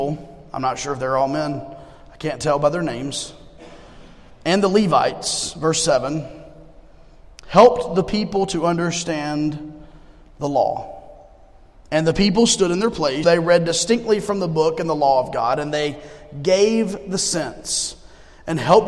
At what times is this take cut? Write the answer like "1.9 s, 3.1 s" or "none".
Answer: 13.2 s

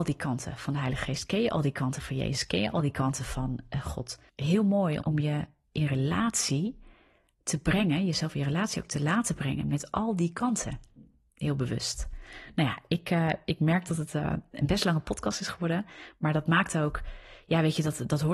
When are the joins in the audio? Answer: 5.0 s

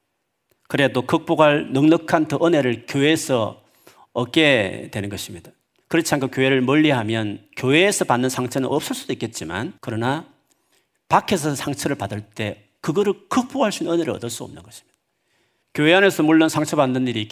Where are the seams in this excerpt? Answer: 9.8 s, 15.6 s

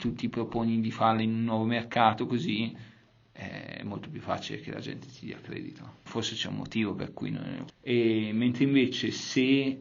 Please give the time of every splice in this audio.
6.1 s, 7.7 s

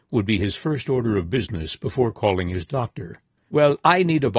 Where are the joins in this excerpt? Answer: 3.4 s

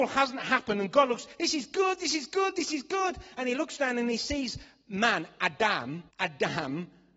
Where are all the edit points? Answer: 6.1 s

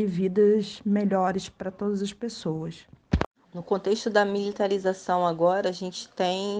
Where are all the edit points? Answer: none

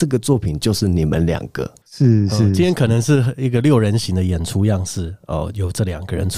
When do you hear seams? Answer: 1.8 s

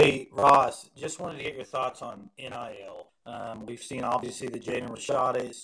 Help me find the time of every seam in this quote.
3.1 s

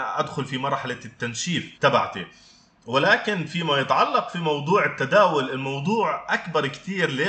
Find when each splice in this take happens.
1.7 s

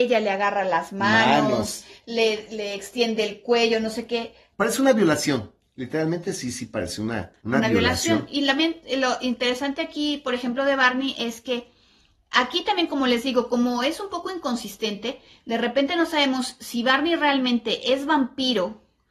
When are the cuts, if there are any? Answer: 4.5 s, 7.4 s

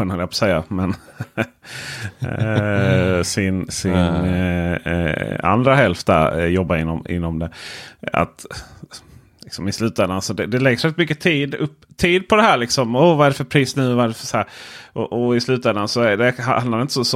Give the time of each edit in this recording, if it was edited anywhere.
none

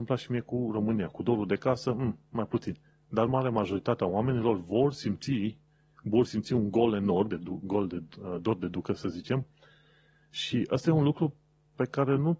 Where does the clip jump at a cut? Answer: 7.3 s

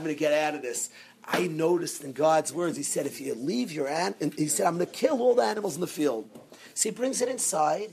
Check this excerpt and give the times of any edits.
none

